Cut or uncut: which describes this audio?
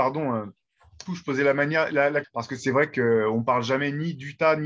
cut